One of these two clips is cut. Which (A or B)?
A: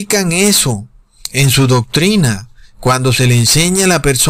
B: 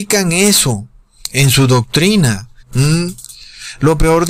B